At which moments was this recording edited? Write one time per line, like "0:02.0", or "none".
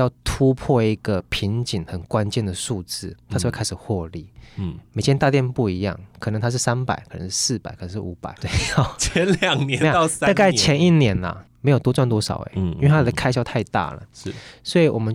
0:08.4
0:11.5